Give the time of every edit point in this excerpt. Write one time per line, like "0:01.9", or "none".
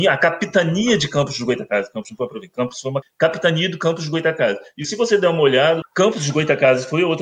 0:03.0
0:05.8

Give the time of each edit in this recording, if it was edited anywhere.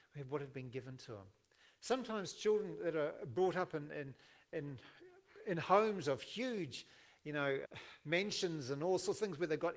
0:07.6

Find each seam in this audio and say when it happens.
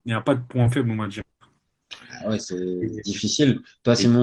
0:02.4

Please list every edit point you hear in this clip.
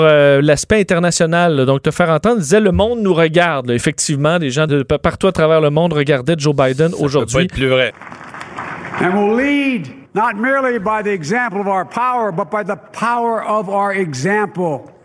0:04.7
0:07.9
0:10.1

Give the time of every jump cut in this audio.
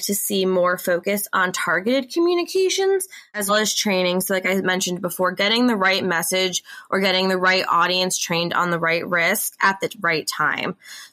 0:03.5

